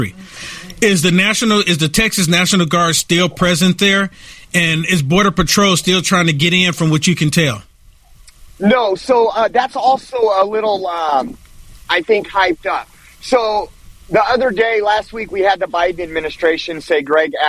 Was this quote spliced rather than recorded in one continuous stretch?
no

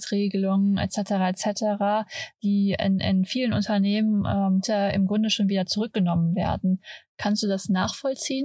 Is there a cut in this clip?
no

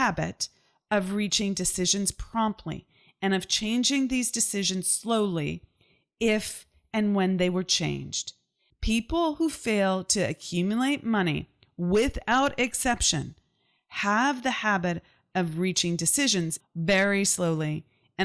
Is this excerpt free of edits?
no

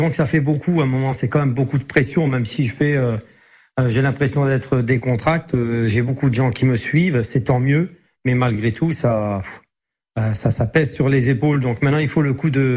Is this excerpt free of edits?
yes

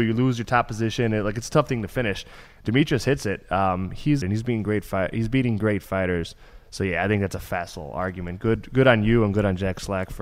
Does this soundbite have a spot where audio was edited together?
yes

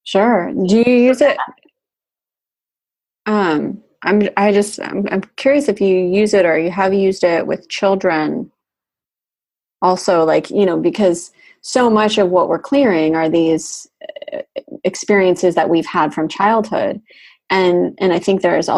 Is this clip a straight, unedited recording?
yes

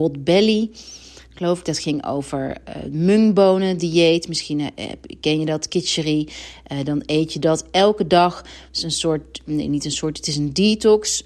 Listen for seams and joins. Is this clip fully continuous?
yes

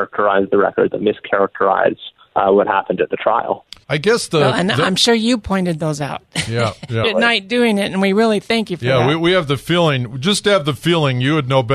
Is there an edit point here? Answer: yes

